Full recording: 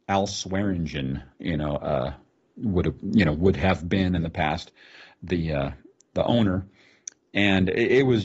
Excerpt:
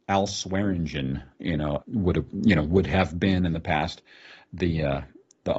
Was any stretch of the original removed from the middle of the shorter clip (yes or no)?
yes